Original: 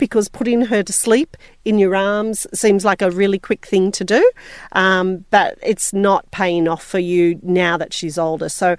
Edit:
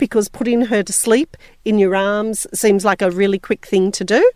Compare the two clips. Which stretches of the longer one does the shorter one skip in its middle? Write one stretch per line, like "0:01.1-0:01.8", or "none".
none